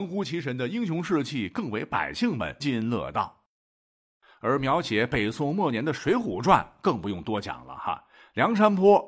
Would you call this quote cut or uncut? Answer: cut